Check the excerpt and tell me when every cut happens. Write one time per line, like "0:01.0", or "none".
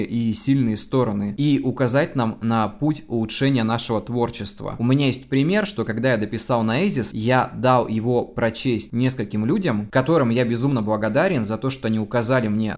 none